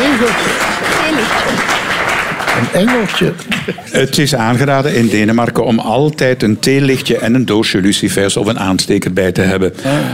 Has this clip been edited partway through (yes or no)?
no